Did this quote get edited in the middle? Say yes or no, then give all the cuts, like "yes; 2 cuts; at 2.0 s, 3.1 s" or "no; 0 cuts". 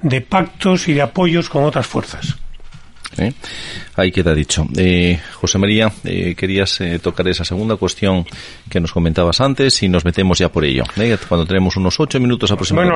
yes; 1 cut; at 3.1 s